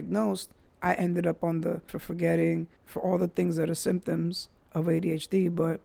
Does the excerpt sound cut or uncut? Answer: cut